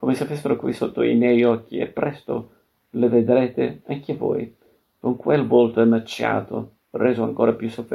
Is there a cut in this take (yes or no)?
no